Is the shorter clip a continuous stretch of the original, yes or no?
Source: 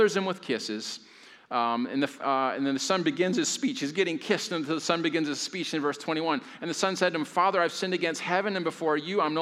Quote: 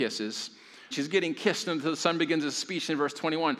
no